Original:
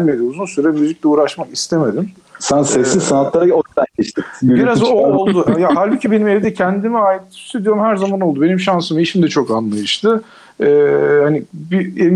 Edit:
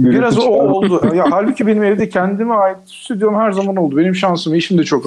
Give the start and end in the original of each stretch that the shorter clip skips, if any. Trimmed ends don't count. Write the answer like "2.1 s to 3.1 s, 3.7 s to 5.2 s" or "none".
none